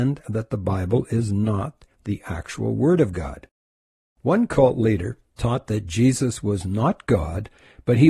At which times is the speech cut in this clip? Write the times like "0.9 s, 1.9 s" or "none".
none